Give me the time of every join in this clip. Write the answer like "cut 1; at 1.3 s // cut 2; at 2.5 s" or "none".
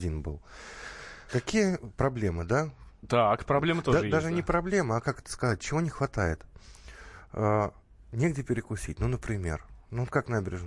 cut 1; at 1.3 s